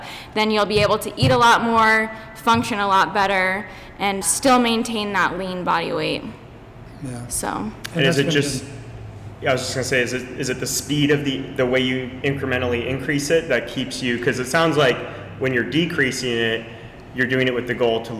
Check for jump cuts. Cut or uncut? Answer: cut